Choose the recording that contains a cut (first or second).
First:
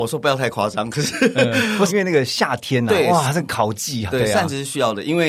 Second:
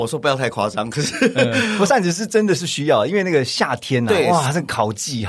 first